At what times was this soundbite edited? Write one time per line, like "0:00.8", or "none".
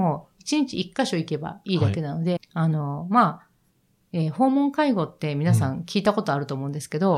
0:02.4